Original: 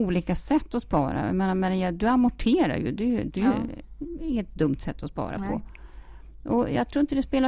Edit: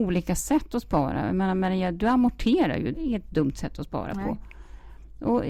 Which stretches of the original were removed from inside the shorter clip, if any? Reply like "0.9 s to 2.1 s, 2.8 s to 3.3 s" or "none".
2.9 s to 4.2 s